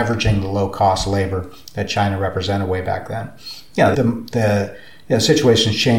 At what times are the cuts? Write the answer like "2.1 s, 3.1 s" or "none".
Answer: 3.9 s

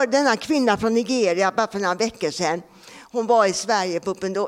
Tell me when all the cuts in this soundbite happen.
none

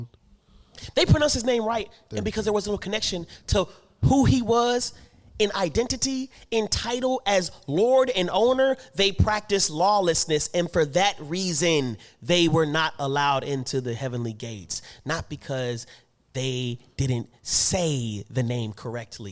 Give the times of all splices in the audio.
none

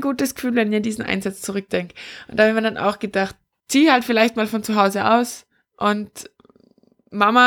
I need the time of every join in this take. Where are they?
3.6 s

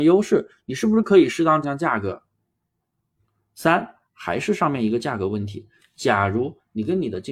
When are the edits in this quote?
1.6 s

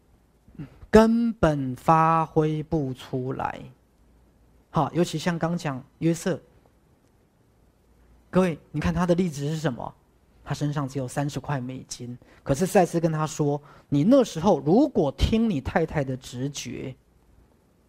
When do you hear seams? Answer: none

